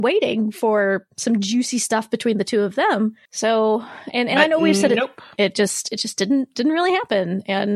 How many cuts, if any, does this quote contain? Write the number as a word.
one